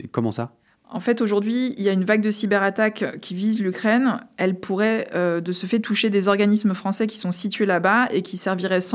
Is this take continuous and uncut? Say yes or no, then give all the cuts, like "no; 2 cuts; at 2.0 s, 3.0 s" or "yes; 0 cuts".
yes; 0 cuts